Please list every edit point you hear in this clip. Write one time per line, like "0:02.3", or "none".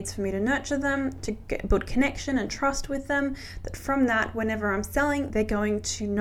none